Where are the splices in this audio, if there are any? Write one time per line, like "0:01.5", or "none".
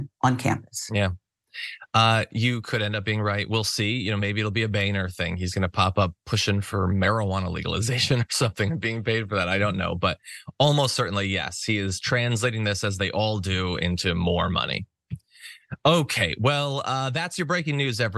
none